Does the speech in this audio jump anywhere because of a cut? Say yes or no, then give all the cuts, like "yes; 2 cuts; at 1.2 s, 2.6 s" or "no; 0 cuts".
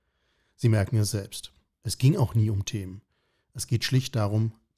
yes; 1 cut; at 1.7 s